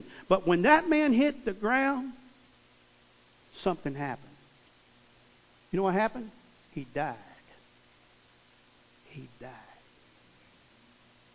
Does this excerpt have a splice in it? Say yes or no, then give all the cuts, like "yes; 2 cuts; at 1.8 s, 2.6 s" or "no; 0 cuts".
no; 0 cuts